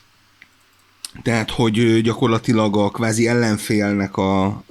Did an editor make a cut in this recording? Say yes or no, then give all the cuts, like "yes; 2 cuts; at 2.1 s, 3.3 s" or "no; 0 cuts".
no; 0 cuts